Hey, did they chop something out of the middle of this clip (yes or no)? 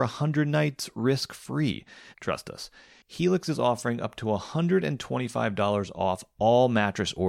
yes